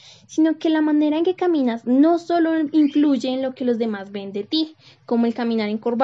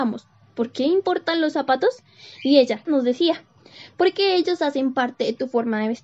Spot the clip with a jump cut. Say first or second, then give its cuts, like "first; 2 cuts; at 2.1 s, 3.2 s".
second; 1 cut; at 2.9 s